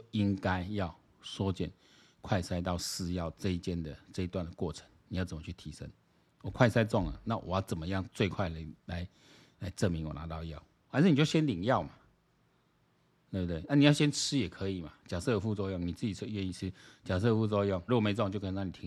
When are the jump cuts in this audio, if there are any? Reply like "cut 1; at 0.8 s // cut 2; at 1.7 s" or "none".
cut 1; at 8.8 s // cut 2; at 17.9 s